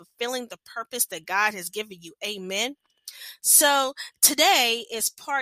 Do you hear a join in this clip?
no; 0 cuts

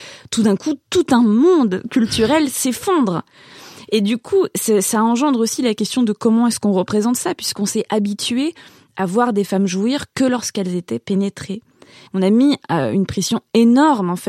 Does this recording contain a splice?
yes; 1 cut; at 12.1 s

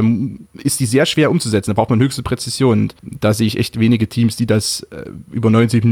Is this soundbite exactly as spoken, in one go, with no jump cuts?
no; 1 cut; at 3.0 s

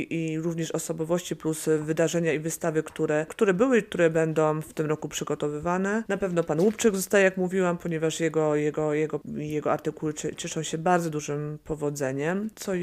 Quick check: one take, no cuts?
yes; 0 cuts

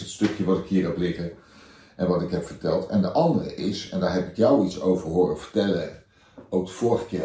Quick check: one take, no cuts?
yes; 0 cuts

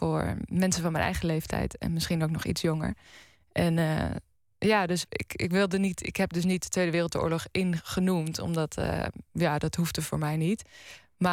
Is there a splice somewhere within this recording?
yes; 1 cut; at 5.0 s

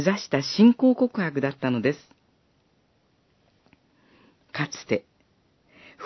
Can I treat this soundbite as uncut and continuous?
yes; 0 cuts

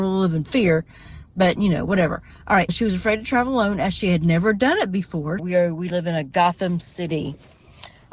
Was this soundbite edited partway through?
yes; 2 cuts; at 2.7 s, 5.4 s

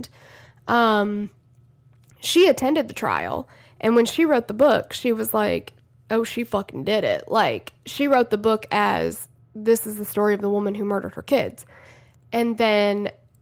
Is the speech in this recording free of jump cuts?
yes; 0 cuts

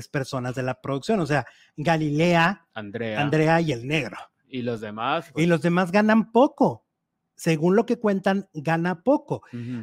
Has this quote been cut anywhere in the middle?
no; 0 cuts

